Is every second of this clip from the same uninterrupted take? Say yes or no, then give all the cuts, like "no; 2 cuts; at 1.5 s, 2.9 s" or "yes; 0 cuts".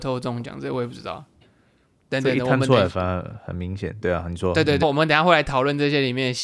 no; 2 cuts; at 1.4 s, 4.8 s